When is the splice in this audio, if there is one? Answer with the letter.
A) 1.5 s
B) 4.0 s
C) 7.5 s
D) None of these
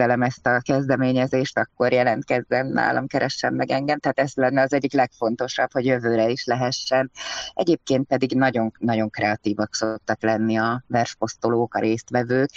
D